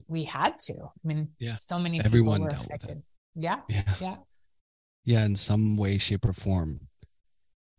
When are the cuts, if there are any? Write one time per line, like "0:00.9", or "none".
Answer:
none